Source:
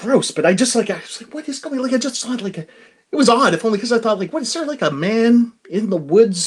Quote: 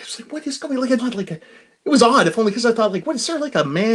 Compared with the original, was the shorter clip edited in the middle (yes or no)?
yes